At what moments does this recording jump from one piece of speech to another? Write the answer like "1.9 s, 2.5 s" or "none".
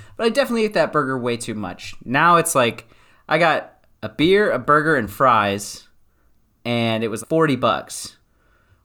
4.0 s, 7.2 s

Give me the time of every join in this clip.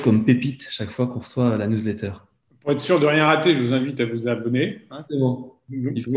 5.1 s

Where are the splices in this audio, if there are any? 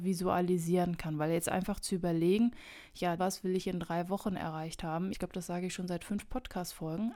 3.2 s, 5.1 s

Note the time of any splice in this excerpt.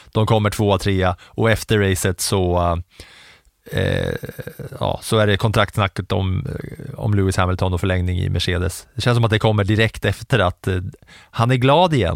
none

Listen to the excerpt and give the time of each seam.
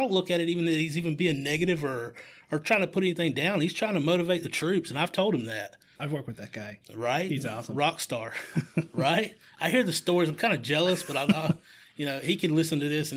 6.0 s

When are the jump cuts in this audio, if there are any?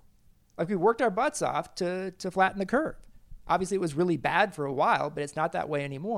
none

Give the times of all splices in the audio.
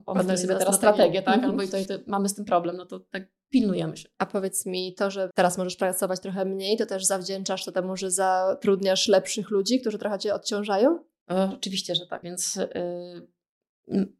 12.2 s

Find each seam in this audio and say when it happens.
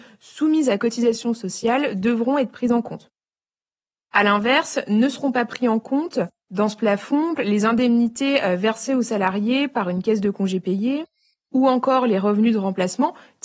7.4 s

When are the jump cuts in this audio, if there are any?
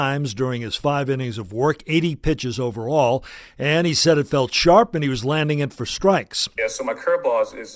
6.6 s

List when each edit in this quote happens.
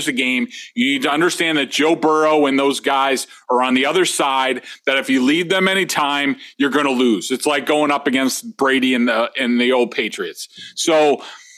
none

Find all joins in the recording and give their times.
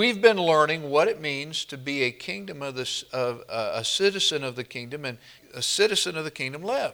5.4 s

